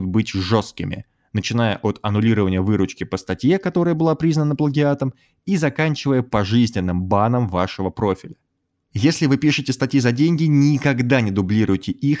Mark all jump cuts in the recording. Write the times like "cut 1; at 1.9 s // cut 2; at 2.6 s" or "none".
none